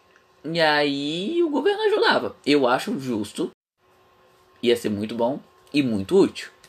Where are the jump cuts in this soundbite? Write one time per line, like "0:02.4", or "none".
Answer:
none